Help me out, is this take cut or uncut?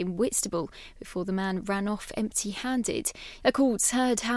cut